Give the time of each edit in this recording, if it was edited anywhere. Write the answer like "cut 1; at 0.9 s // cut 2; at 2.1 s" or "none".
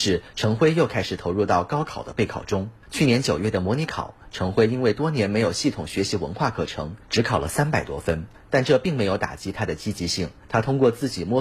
none